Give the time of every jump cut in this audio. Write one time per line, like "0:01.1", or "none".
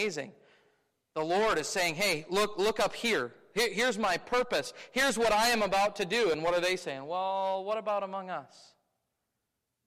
none